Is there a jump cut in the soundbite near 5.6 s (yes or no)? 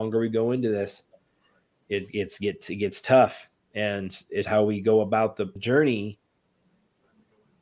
yes